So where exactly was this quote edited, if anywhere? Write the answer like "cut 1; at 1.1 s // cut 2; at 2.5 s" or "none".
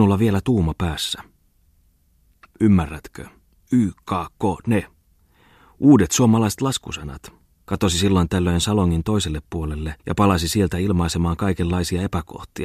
cut 1; at 7.7 s // cut 2; at 10.0 s